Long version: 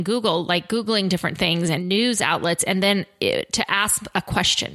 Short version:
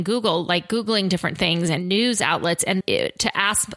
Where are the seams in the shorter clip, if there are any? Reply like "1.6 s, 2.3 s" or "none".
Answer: 2.8 s